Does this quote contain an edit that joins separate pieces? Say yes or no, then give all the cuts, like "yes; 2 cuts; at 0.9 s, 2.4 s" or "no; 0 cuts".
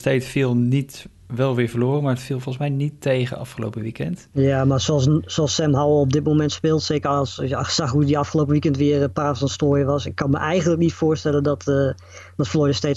no; 0 cuts